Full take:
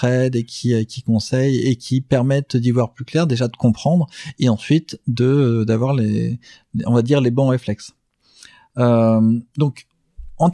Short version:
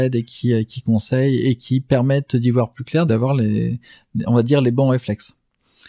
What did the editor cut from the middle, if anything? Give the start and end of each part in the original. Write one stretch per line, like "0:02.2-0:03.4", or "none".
0:03.3-0:05.7